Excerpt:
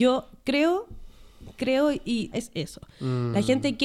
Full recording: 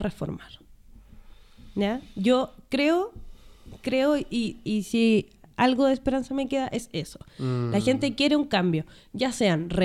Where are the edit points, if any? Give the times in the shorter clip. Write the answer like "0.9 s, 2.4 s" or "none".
2.3 s